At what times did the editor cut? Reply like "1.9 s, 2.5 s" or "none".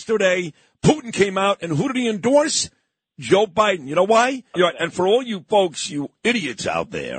4.5 s